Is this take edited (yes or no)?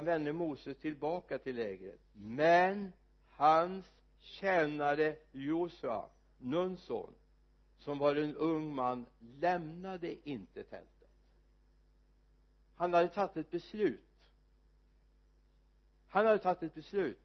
yes